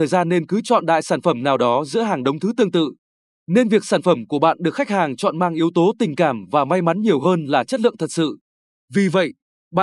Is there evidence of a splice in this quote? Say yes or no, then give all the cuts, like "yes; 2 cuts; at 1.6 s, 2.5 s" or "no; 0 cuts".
no; 0 cuts